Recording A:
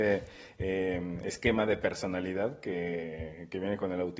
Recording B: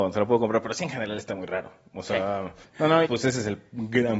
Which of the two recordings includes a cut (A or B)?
B